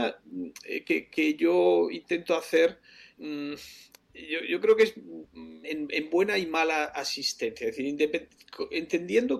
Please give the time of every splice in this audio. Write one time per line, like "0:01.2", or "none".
0:03.1
0:05.6